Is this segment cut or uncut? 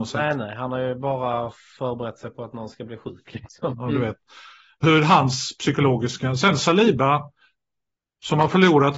cut